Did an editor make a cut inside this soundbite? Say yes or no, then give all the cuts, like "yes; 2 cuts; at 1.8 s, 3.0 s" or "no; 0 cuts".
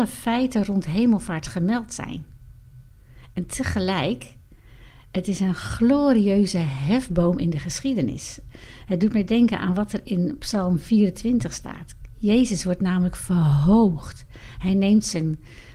no; 0 cuts